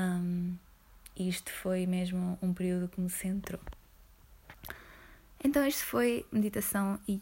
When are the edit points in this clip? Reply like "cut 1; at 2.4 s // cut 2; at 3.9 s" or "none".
cut 1; at 1.1 s